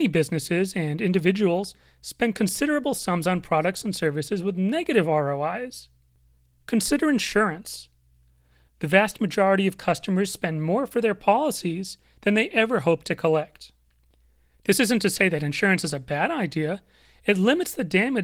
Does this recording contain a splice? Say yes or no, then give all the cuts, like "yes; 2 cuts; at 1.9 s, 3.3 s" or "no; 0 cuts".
yes; 1 cut; at 8.7 s